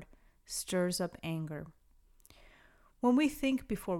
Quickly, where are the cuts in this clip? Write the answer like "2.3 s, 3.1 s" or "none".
none